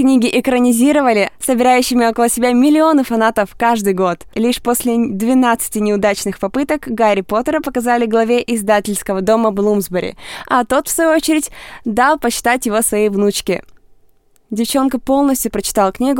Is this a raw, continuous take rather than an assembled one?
no; 2 cuts; at 1.3 s, 4.3 s

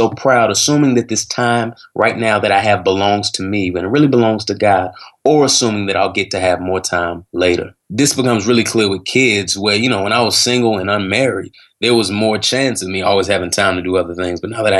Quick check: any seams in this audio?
no; 0 cuts

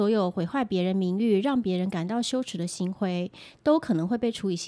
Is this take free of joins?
yes; 0 cuts

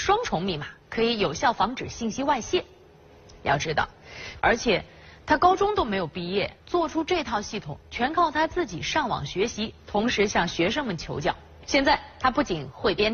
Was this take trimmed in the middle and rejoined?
yes; 2 cuts; at 4.4 s, 6.6 s

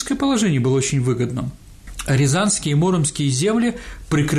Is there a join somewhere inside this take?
no; 0 cuts

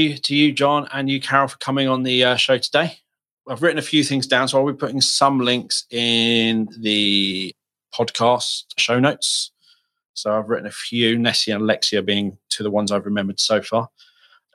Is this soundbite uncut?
yes; 0 cuts

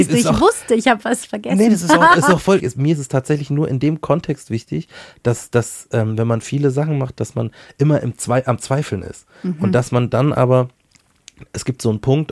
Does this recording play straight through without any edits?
no; 1 cut; at 2.6 s

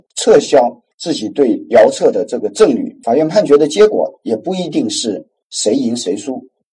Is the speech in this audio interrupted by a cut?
no; 0 cuts

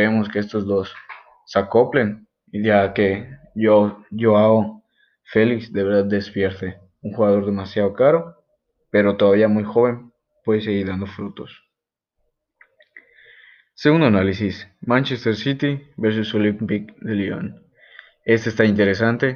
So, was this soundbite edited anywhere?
no; 0 cuts

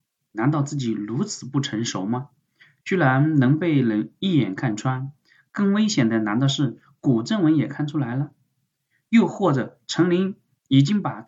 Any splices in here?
no; 0 cuts

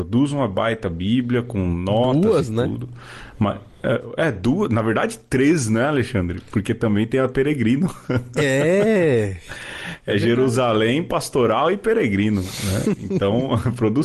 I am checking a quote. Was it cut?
no; 0 cuts

